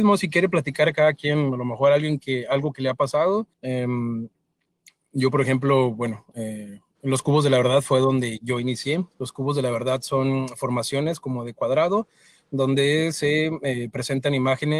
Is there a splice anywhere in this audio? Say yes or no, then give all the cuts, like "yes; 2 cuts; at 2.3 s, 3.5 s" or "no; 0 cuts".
yes; 1 cut; at 3.5 s